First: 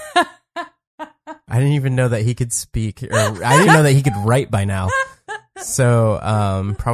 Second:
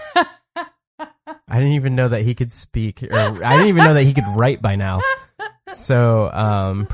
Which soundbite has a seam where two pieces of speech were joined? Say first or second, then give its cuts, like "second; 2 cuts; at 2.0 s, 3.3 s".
first; 1 cut; at 3.7 s